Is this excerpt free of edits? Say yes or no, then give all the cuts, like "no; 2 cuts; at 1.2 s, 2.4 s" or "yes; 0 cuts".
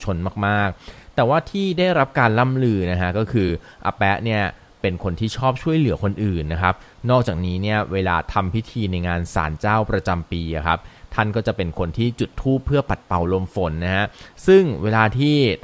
yes; 0 cuts